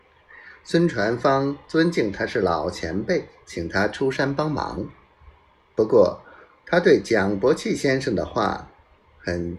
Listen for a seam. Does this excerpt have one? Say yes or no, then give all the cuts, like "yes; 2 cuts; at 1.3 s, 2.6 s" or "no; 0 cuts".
yes; 1 cut; at 3.4 s